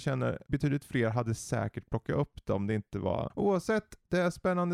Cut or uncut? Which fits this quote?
cut